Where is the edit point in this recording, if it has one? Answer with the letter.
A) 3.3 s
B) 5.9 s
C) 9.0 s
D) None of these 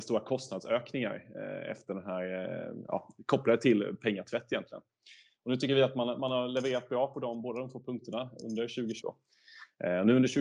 C